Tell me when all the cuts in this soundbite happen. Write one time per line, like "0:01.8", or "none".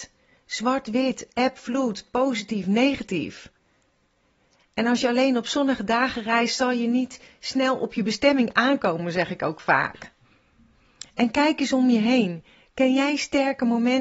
none